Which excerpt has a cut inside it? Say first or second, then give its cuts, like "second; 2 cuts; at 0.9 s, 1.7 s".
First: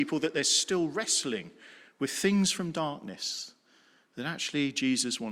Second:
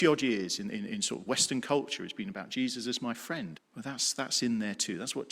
second; 1 cut; at 3.5 s